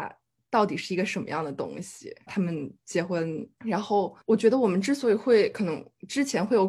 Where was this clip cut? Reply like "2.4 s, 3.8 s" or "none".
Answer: 2.3 s, 3.6 s